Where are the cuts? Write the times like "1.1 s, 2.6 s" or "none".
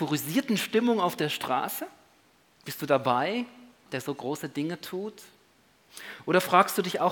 3.9 s